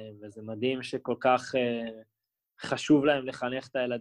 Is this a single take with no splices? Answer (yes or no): yes